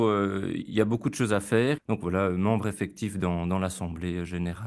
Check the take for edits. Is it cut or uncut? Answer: cut